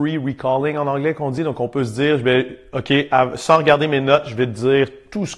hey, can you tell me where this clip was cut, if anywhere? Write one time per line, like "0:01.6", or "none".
none